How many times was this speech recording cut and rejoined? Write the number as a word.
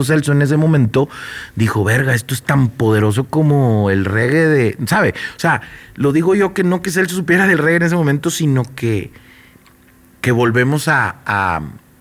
zero